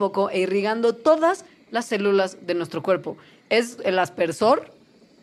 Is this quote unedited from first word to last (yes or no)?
no